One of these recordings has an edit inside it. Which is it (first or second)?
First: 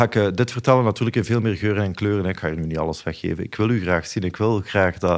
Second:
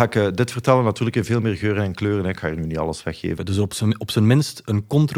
second